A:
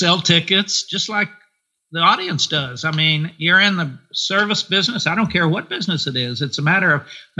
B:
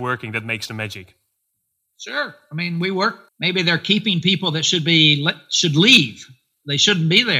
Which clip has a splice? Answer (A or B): B